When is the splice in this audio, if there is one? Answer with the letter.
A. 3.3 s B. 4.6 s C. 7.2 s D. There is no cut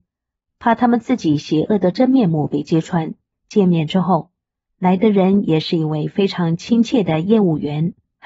A